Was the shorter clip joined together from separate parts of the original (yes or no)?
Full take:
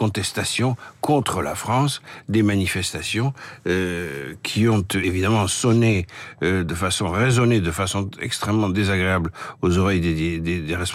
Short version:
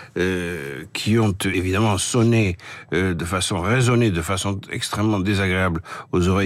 no